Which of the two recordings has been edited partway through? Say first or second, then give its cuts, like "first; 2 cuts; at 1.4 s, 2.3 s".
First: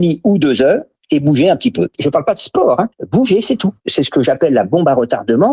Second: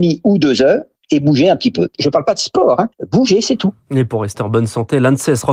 first; 1 cut; at 3.8 s